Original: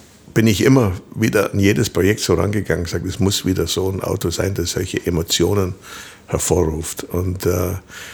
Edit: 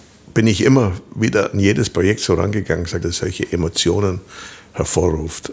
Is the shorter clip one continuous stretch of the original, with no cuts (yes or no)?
no